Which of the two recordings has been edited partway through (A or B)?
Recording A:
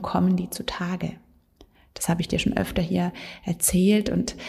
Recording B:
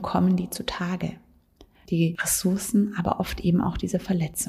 B